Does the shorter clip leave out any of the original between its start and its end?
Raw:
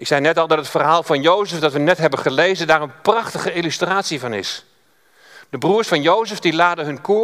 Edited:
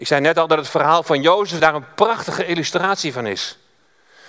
yes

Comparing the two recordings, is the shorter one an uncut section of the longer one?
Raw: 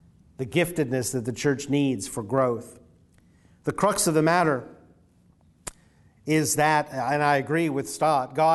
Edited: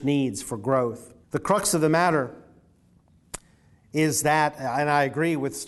no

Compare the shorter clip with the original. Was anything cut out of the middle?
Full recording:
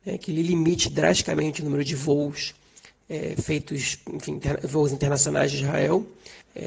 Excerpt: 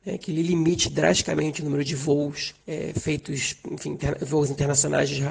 yes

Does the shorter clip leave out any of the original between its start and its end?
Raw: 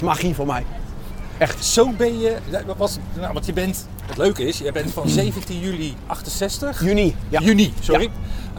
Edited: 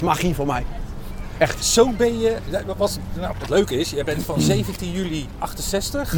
yes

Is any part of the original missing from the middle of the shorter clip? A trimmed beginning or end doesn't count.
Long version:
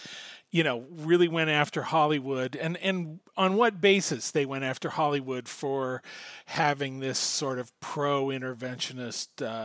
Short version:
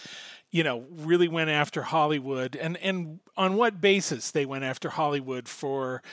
no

